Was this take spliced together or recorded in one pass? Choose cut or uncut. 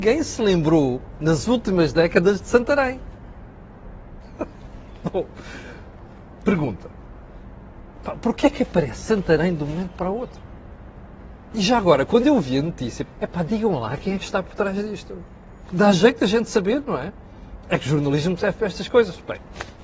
cut